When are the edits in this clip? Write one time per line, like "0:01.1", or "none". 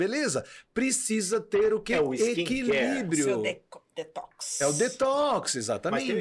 none